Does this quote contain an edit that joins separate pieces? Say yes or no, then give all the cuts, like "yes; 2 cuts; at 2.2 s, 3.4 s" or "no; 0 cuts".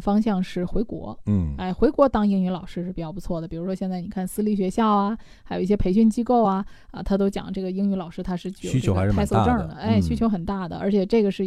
no; 0 cuts